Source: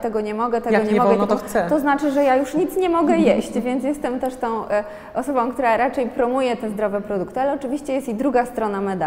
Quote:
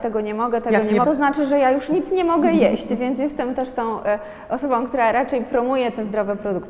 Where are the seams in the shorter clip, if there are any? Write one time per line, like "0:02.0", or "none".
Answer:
0:01.0